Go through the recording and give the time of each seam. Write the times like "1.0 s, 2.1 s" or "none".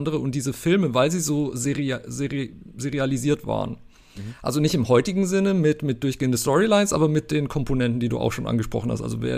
none